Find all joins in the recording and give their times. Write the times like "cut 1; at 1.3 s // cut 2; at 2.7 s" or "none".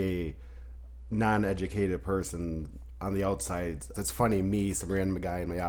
cut 1; at 3.9 s